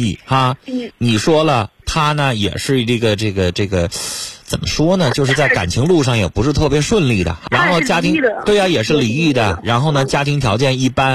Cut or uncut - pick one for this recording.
cut